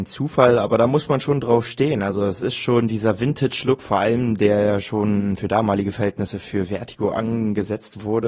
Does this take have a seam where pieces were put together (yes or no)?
no